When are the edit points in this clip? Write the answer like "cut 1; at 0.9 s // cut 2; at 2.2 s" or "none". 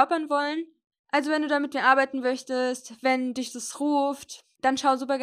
cut 1; at 0.9 s

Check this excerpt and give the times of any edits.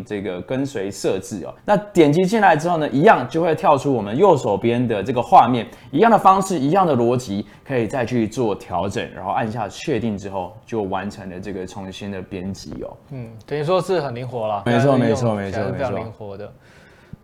cut 1; at 1.6 s // cut 2; at 14.7 s

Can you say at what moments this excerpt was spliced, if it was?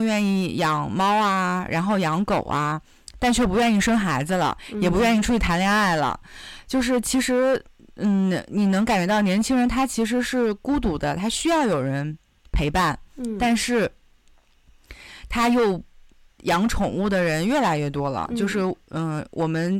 cut 1; at 16.3 s

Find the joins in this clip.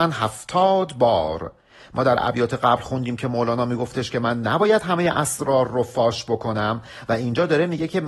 none

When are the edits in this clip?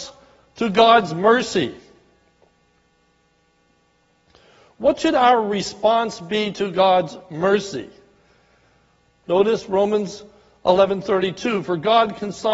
cut 1; at 9.2 s

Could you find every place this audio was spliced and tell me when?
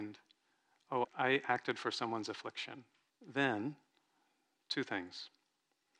cut 1; at 1.0 s // cut 2; at 3.1 s

